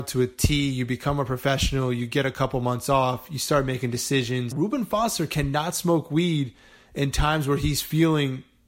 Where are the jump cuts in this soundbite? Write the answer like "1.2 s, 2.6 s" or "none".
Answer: 4.5 s